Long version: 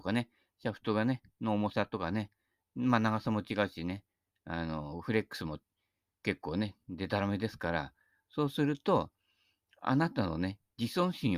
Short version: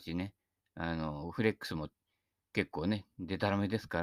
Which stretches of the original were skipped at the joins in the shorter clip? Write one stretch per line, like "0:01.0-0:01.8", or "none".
none